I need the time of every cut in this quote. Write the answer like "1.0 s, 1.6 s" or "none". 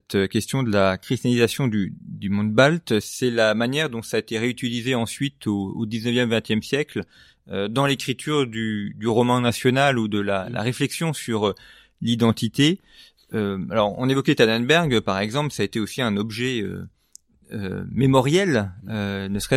none

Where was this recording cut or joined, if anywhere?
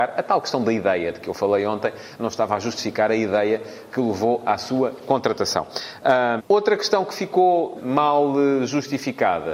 6.4 s, 7.8 s

